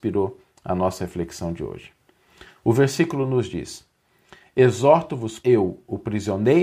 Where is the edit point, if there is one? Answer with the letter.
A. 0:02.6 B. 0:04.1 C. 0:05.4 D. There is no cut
C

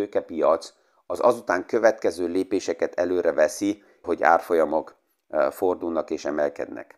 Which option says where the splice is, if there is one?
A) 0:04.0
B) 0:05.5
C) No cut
A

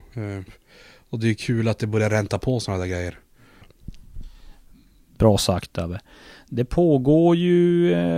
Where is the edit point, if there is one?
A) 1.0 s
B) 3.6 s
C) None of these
B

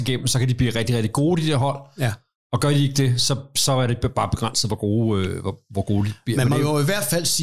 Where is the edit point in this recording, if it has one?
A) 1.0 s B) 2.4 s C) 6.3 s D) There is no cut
D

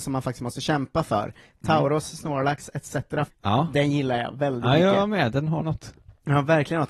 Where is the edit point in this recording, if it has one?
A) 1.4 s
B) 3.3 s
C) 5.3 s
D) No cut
B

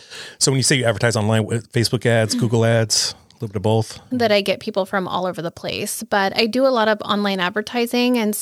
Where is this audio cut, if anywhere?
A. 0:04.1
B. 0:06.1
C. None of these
A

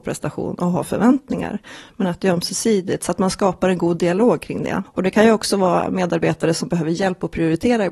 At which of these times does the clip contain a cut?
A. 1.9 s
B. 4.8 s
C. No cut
B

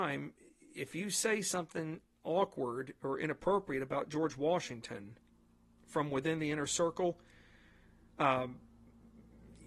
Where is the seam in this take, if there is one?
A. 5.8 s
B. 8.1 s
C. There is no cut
C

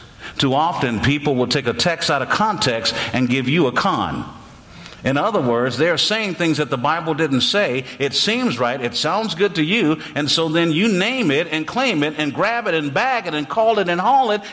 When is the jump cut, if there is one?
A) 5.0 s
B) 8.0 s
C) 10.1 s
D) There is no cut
D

